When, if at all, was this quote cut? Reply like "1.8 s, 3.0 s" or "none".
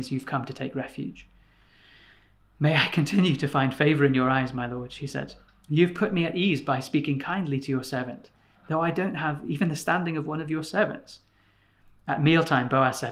none

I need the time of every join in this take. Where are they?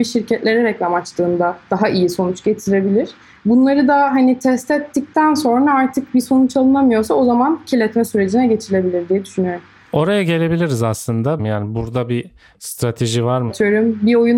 11.4 s, 13.5 s

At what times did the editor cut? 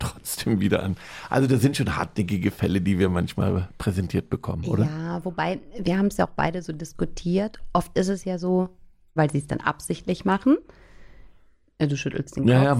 9.2 s

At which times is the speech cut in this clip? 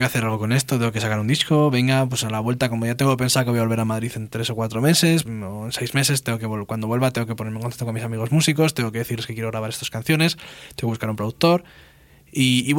5.3 s

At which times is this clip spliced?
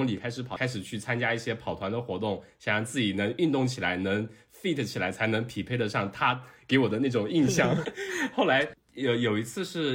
7.8 s

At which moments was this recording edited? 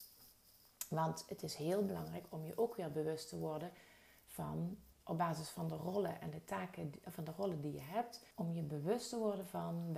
4.9 s, 8.3 s

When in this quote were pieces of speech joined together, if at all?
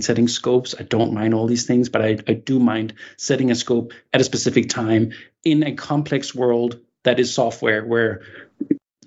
none

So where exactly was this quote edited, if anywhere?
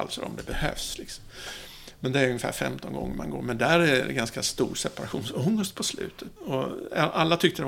6.4 s

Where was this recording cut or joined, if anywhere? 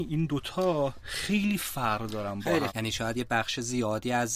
2.7 s

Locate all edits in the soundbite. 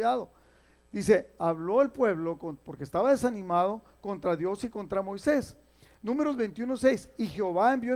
none

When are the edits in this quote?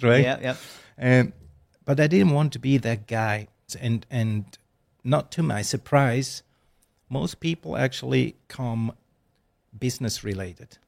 3.7 s, 8.4 s

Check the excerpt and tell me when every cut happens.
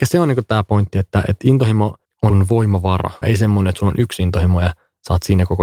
3.2 s

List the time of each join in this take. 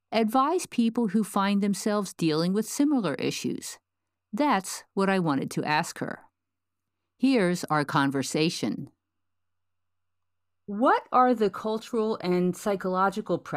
none

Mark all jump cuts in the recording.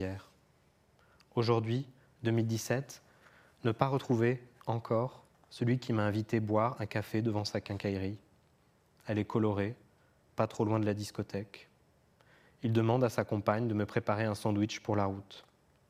none

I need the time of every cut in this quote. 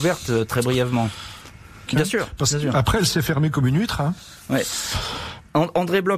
1.9 s

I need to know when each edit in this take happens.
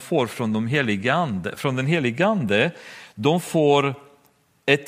none

